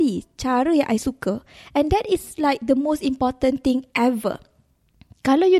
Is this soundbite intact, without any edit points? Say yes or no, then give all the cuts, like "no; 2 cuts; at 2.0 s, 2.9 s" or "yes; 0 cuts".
yes; 0 cuts